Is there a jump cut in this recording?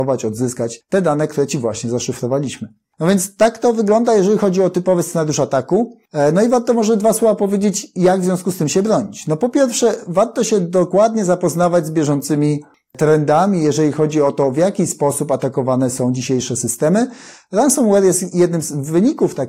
no; 0 cuts

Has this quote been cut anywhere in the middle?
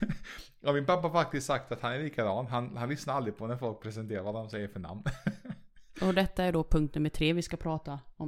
no; 0 cuts

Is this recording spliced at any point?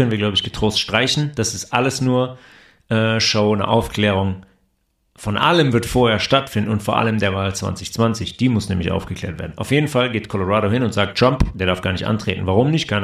no; 0 cuts

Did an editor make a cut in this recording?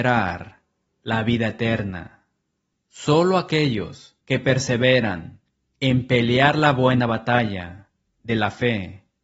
yes; 2 cuts; at 2.7 s, 4.2 s

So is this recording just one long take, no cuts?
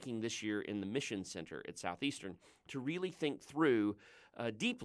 yes; 0 cuts

